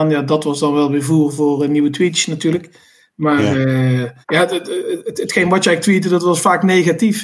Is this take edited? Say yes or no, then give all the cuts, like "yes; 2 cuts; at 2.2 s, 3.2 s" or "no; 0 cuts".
yes; 1 cut; at 4.2 s